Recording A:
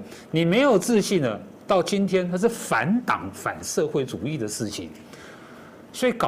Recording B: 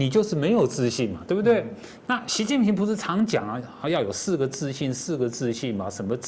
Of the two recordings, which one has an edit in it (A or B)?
B